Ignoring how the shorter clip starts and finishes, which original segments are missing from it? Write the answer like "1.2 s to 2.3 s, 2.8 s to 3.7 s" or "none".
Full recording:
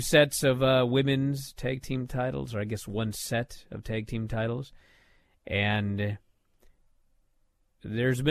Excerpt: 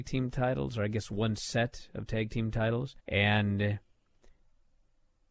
4.8 s to 5.4 s